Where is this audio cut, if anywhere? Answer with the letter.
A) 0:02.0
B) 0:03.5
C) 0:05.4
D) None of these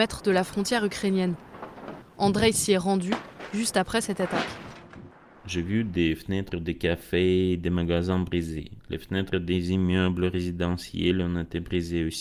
A